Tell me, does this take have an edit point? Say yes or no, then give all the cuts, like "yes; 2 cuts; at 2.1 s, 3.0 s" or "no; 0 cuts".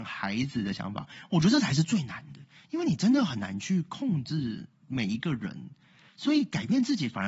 no; 0 cuts